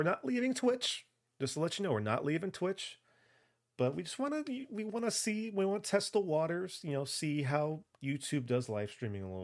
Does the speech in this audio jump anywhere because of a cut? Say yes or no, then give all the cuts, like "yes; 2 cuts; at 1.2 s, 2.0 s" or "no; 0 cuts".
no; 0 cuts